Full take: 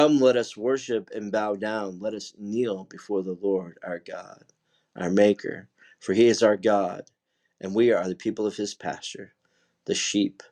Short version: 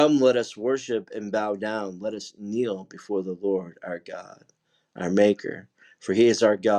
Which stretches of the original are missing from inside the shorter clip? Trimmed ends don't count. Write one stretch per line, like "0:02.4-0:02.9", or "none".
none